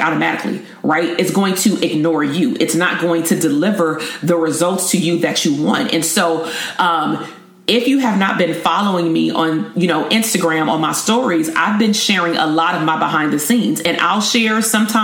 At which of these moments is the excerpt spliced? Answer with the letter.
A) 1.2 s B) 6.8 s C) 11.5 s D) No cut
D